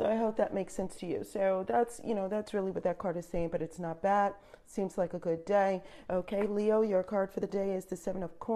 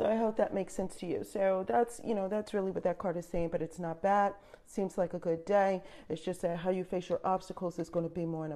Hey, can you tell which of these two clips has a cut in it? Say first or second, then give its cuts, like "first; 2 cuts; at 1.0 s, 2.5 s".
first; 1 cut; at 6.1 s